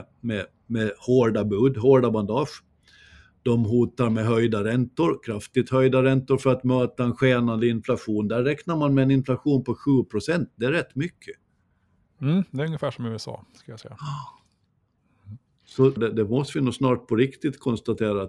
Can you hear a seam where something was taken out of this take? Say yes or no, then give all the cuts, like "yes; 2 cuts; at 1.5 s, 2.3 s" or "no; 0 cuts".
yes; 1 cut; at 16.0 s